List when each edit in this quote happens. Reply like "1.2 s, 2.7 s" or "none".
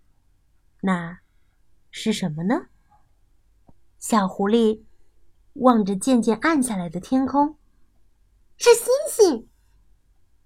none